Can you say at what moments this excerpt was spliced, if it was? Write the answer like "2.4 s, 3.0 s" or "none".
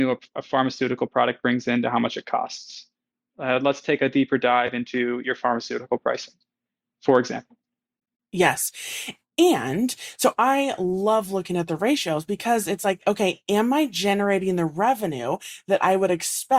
3.3 s